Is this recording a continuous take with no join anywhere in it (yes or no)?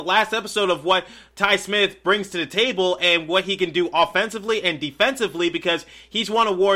yes